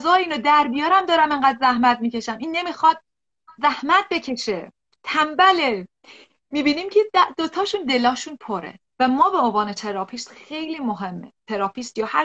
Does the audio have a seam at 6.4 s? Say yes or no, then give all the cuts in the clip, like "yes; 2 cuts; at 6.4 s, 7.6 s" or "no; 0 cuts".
no; 1 cut; at 8.9 s